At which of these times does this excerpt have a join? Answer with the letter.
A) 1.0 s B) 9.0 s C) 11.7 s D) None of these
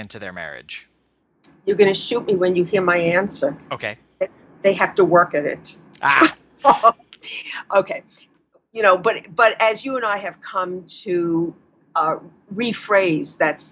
D